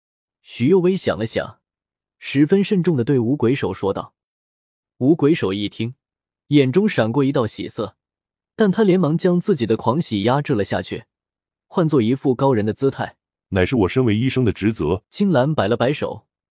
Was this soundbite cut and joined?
yes; 2 cuts; at 13.3 s, 15.0 s

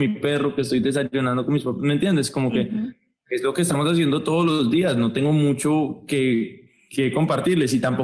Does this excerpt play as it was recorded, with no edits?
yes; 0 cuts

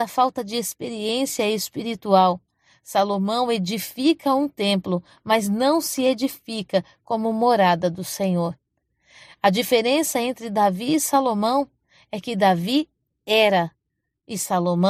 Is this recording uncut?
yes; 0 cuts

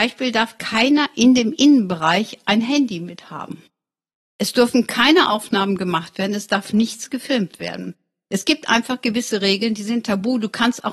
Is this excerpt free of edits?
yes; 0 cuts

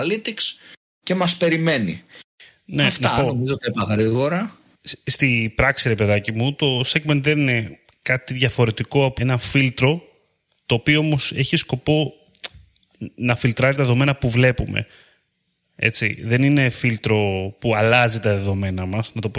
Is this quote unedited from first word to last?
no; 1 cut; at 9.2 s

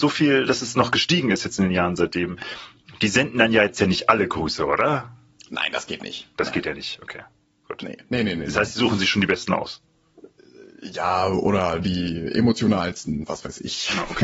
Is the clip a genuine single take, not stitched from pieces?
yes; 0 cuts

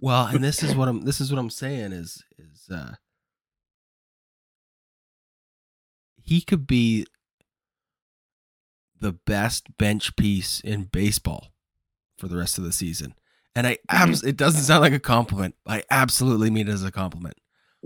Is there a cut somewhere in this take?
no; 0 cuts

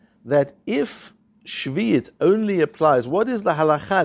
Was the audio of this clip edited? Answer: no; 0 cuts

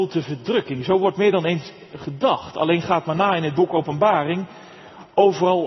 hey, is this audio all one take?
yes; 0 cuts

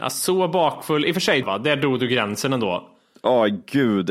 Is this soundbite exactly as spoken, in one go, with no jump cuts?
no; 1 cut; at 1.4 s

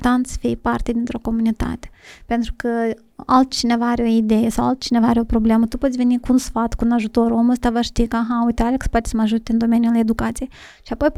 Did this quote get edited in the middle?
yes; 1 cut; at 6.2 s

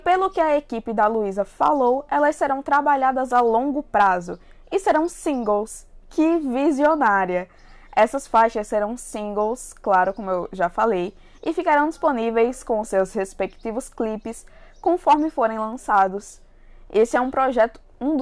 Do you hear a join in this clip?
no; 0 cuts

